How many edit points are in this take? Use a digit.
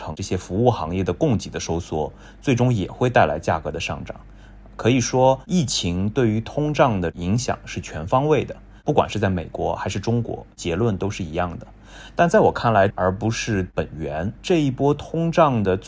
2